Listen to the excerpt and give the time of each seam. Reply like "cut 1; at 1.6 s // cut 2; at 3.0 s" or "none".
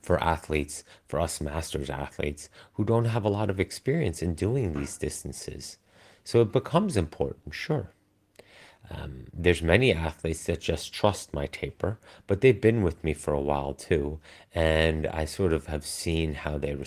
none